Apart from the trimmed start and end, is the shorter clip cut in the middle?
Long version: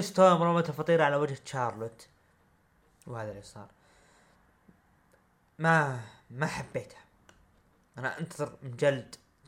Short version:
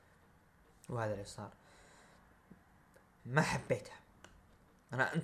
yes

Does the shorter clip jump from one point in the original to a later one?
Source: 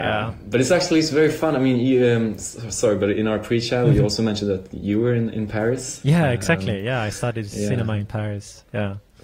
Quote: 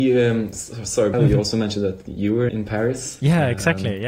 yes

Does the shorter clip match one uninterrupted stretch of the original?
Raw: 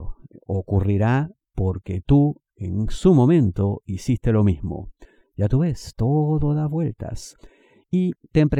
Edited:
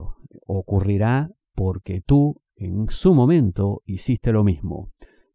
yes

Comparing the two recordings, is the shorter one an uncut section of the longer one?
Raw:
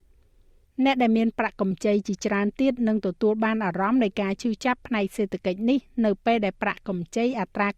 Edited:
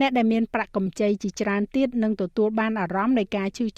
yes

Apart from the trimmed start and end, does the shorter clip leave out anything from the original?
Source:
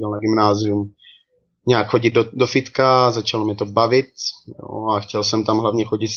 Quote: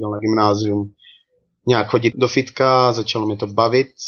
yes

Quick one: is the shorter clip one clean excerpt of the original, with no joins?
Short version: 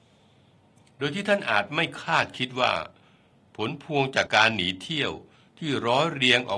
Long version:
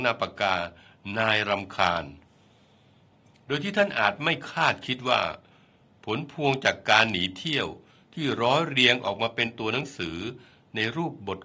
no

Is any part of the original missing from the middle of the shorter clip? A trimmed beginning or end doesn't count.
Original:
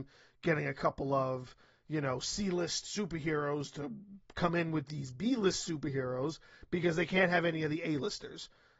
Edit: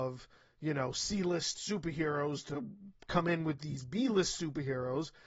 no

